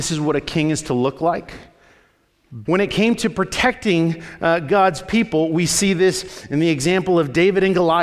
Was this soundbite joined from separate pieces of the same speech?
yes; 1 cut; at 2.6 s

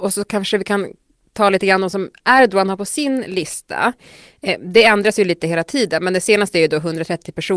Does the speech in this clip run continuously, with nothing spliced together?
yes; 0 cuts

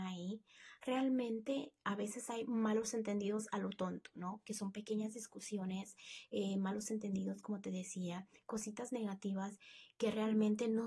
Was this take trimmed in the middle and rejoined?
no; 0 cuts

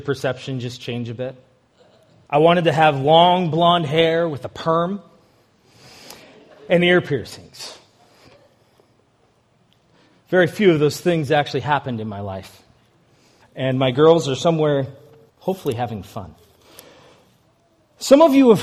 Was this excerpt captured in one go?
no; 3 cuts; at 2.3 s, 13.4 s, 15.3 s

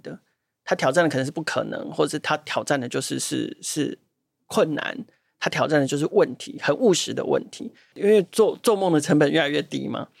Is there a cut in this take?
yes; 1 cut; at 7.9 s

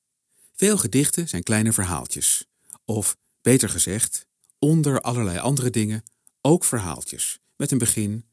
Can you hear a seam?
yes; 1 cut; at 4.4 s

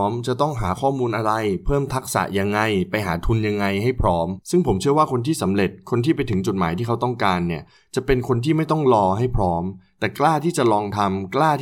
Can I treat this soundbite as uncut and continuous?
no; 1 cut; at 4.4 s

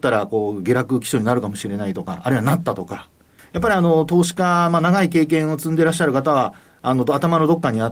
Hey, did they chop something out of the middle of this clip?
yes; 1 cut; at 3.4 s

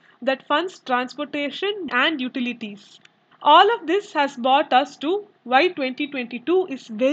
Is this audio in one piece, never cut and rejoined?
no; 2 cuts; at 1.9 s, 3.3 s

